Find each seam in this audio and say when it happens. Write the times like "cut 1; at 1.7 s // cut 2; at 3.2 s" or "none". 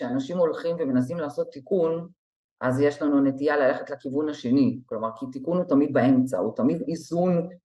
none